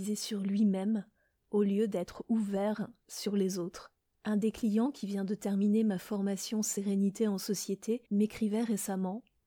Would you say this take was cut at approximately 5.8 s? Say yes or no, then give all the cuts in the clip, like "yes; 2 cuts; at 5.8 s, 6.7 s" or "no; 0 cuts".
no; 2 cuts; at 4.1 s, 8.1 s